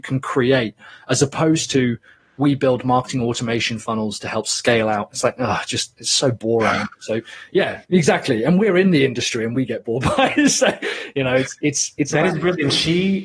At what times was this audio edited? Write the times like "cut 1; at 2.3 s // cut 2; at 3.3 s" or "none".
none